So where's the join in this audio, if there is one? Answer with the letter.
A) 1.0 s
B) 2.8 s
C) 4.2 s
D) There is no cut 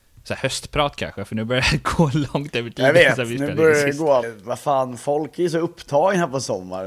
C